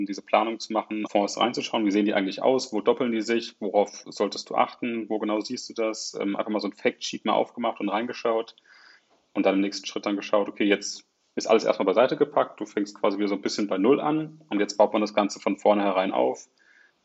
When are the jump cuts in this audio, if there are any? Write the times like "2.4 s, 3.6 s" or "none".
1.1 s